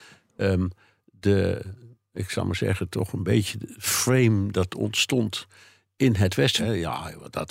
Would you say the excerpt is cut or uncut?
cut